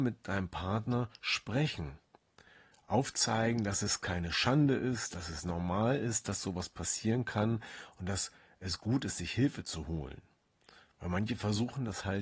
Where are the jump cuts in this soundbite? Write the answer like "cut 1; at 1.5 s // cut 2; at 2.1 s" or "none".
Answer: none